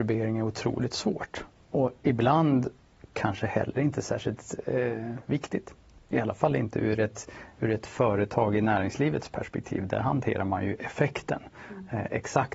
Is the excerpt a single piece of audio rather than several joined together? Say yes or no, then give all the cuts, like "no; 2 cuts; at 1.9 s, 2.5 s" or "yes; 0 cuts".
yes; 0 cuts